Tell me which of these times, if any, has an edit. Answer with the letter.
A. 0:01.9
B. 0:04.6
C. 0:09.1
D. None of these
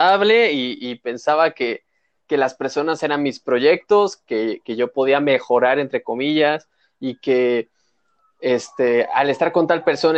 D